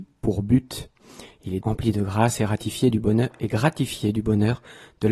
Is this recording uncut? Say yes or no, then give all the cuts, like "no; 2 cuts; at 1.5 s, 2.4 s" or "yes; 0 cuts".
no; 1 cut; at 1.6 s